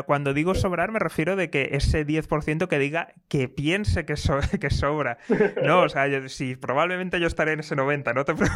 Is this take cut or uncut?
uncut